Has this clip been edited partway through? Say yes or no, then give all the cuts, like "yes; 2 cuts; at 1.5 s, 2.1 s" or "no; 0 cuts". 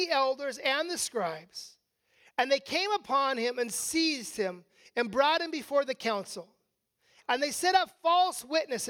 no; 0 cuts